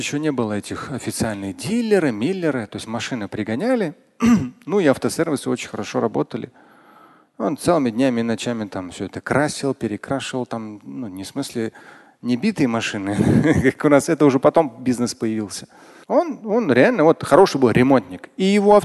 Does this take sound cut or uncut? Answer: cut